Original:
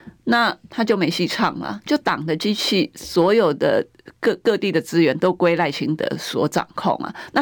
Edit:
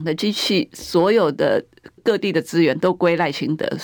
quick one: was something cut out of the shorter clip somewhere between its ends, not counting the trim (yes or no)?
yes